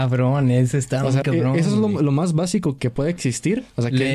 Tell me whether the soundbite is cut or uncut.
cut